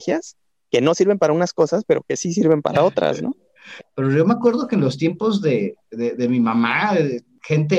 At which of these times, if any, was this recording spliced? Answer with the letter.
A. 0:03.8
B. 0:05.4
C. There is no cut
A